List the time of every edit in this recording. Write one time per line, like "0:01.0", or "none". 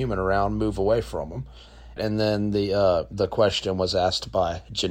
0:02.0